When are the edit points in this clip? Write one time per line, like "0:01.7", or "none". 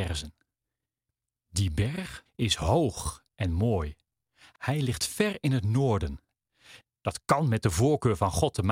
0:02.3
0:06.9

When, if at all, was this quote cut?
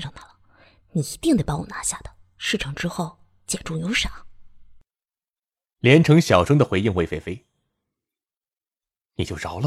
0:03.6

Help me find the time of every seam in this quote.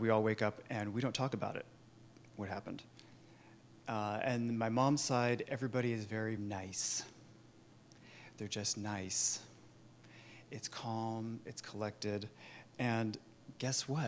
0:06.4

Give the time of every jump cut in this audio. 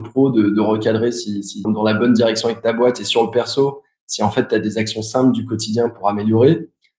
0:01.6

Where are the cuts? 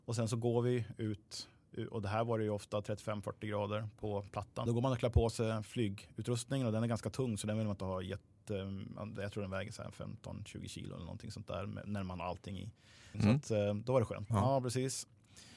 0:04.7
0:13.1
0:14.3

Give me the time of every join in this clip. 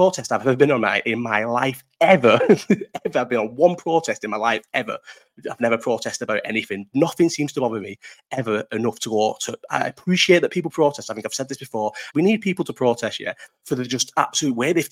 0:12.1
0:13.5

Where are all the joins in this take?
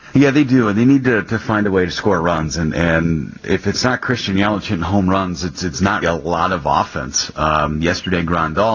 0:06.0

